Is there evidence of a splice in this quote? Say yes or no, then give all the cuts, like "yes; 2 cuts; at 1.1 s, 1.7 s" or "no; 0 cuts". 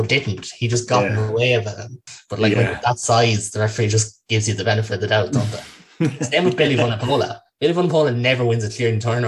no; 0 cuts